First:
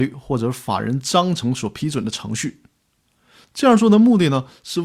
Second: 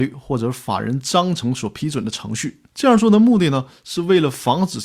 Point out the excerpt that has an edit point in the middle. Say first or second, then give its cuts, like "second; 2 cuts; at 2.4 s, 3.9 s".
second; 1 cut; at 2.7 s